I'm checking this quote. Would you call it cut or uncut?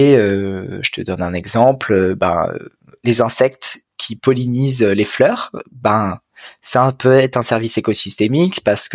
uncut